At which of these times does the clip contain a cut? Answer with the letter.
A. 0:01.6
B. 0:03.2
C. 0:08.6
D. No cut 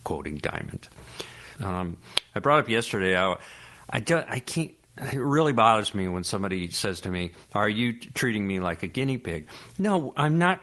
A